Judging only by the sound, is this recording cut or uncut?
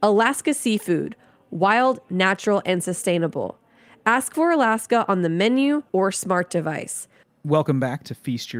cut